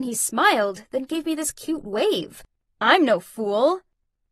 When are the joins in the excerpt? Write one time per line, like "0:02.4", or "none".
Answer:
0:02.7